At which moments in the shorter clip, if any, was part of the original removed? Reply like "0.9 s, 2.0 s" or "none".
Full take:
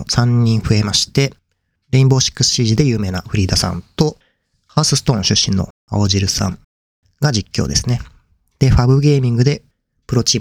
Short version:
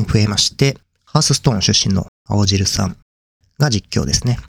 1.0 s